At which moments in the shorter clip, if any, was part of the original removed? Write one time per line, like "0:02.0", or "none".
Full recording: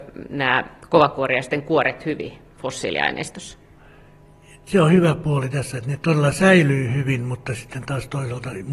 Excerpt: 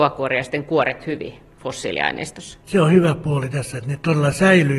0:02.6